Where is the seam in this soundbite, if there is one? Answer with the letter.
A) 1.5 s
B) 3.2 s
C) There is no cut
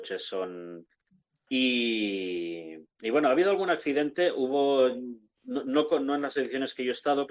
A